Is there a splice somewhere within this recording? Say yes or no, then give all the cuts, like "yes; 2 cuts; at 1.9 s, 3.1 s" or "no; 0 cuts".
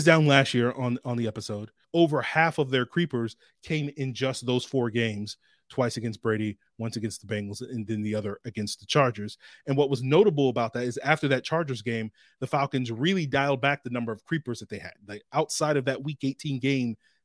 yes; 1 cut; at 1.8 s